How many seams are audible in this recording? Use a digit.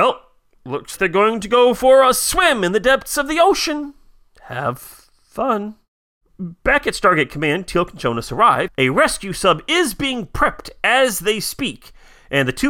2